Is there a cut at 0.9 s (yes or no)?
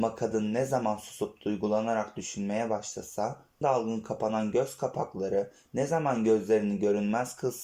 no